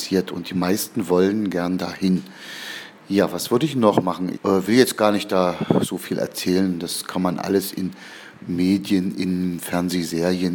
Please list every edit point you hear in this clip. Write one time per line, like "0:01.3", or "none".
0:04.3